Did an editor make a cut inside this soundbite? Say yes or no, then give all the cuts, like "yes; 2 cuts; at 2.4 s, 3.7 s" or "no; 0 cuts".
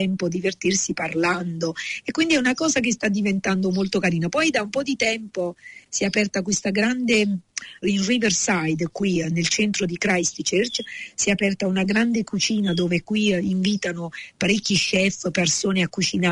yes; 1 cut; at 7.8 s